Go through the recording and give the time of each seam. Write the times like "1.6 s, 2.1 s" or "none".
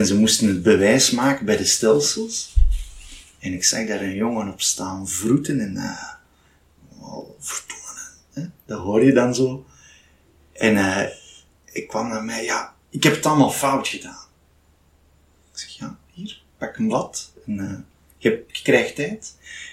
none